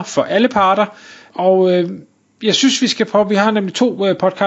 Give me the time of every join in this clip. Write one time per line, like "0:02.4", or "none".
0:01.3